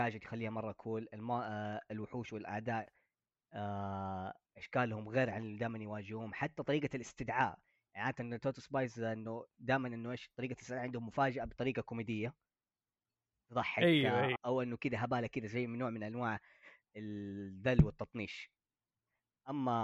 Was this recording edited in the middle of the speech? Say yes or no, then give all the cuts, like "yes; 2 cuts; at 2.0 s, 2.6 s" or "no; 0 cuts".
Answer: yes; 1 cut; at 14.4 s